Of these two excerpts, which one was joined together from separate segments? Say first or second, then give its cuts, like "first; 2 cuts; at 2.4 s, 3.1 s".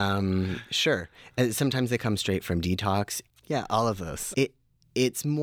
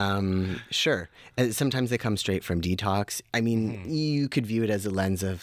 first; 2 cuts; at 3.3 s, 4.3 s